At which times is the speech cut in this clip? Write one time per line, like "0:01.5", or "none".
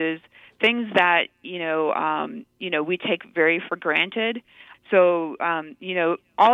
0:04.7